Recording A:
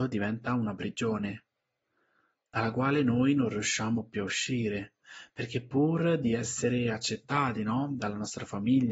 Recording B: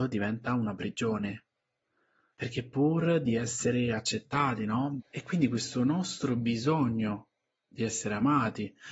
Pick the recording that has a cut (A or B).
B